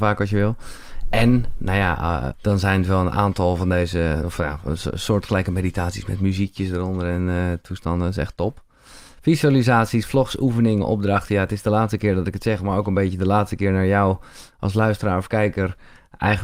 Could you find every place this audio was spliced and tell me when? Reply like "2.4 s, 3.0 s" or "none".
2.3 s